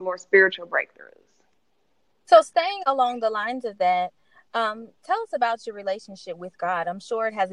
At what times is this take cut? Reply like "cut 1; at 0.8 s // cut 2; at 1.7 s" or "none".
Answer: none